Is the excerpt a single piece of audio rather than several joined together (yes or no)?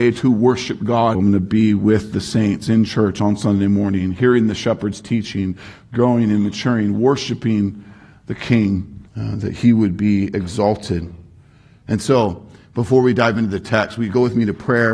no